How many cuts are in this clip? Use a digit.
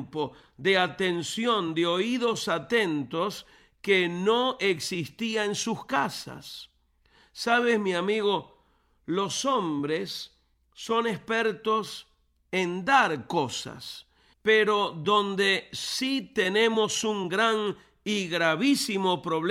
1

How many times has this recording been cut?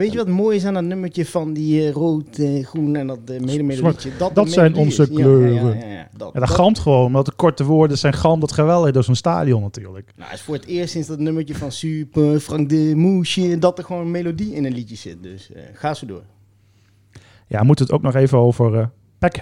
0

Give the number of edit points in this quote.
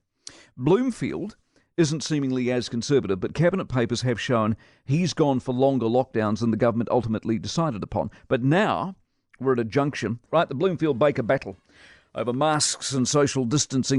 1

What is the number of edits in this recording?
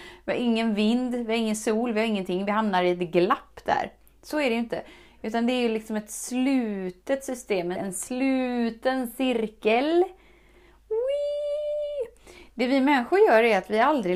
1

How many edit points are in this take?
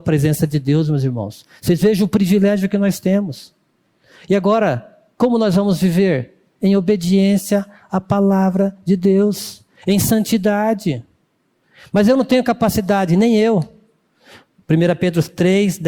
1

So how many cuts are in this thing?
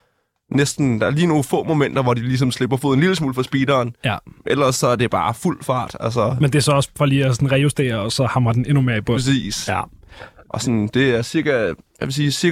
0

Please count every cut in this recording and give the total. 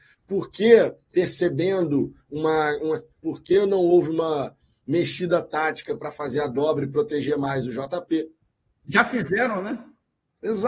2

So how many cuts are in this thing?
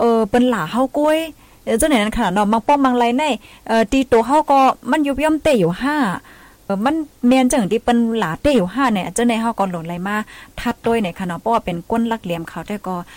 1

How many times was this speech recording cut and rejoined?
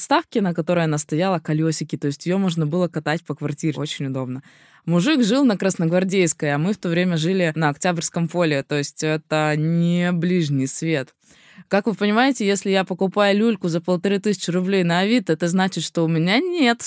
0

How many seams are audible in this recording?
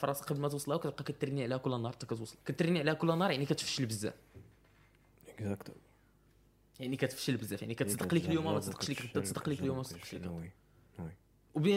1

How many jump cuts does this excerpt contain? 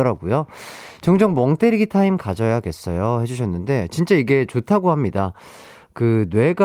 0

